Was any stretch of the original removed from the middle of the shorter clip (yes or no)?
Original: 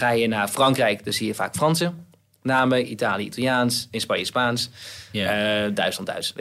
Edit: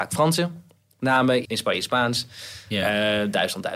yes